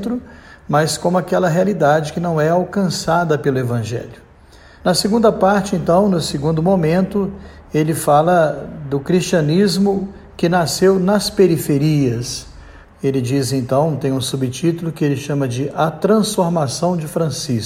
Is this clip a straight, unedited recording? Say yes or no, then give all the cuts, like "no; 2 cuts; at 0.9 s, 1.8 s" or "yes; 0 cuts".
no; 2 cuts; at 4.8 s, 12.8 s